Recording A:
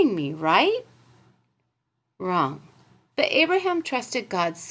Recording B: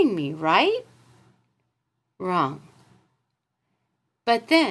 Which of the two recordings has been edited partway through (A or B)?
A